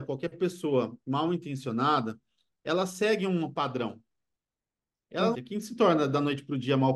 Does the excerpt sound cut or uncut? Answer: cut